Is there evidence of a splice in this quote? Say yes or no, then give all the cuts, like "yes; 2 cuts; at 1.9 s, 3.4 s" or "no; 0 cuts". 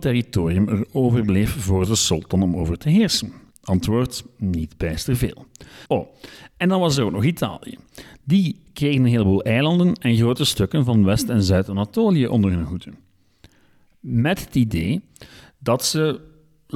yes; 1 cut; at 5.9 s